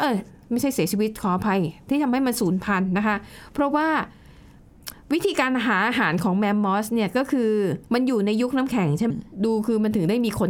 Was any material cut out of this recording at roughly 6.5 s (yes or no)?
no